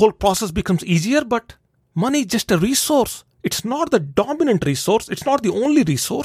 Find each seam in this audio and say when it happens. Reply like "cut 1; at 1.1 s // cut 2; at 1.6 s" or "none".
none